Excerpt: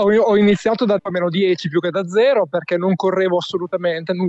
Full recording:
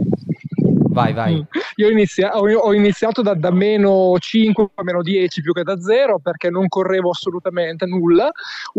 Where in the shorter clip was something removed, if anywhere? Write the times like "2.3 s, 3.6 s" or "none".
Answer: 1.0 s